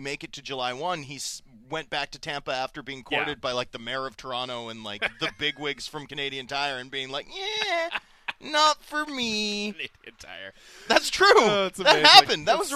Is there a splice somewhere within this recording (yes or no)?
no